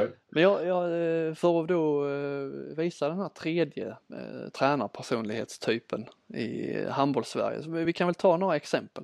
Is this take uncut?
yes; 0 cuts

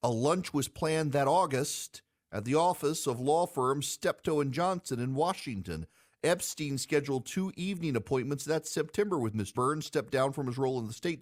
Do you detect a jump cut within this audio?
yes; 1 cut; at 9.5 s

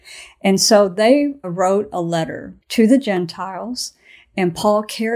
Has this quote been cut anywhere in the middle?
yes; 2 cuts; at 1.4 s, 2.6 s

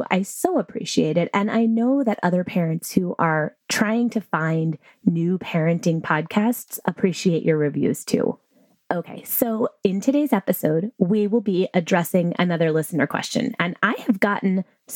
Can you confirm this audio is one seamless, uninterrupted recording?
yes; 0 cuts

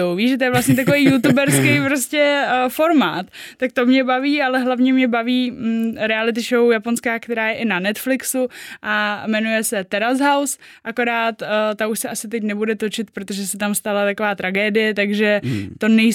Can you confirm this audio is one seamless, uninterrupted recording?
yes; 0 cuts

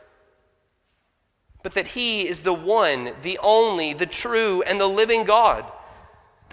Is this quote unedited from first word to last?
yes; 0 cuts

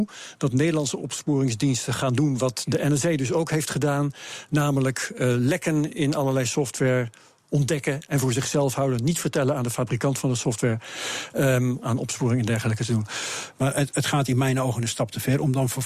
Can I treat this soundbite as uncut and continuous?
no; 2 cuts; at 11.8 s, 13.5 s

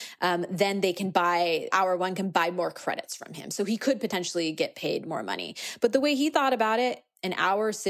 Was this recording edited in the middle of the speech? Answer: yes; 1 cut; at 1.7 s

